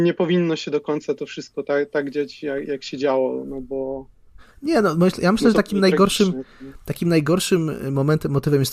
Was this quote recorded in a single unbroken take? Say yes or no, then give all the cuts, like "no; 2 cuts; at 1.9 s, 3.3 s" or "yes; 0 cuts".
yes; 0 cuts